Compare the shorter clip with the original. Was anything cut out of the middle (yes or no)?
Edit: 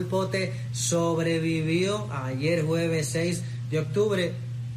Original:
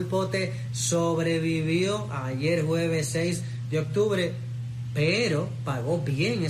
no